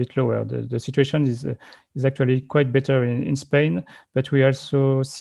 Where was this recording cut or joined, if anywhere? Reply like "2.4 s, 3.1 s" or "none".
none